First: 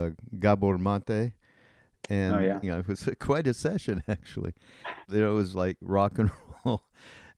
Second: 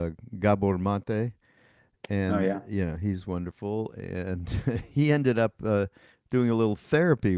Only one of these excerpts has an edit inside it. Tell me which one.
first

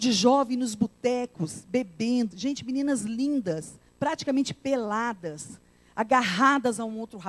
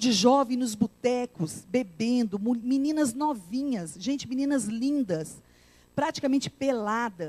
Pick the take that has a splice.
first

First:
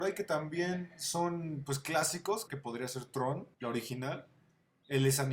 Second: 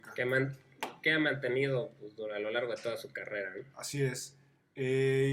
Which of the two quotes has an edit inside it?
first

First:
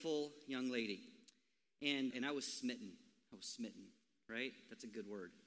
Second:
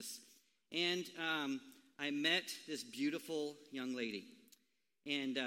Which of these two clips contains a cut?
first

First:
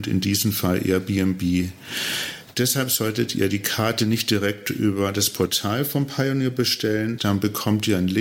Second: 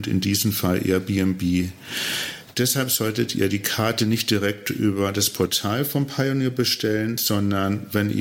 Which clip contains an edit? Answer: first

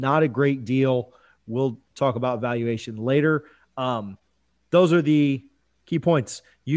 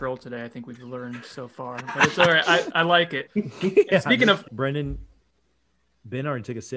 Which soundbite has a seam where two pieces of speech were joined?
second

